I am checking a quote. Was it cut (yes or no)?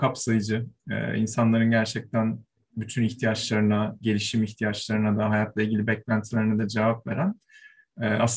no